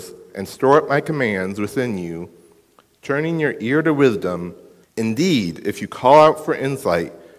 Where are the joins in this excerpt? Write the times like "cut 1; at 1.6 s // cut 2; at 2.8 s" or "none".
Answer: cut 1; at 4.8 s